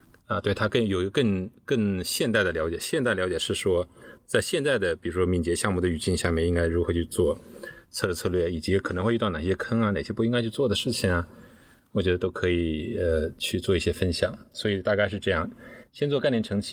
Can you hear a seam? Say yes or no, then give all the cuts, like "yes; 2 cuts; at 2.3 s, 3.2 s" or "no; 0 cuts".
no; 0 cuts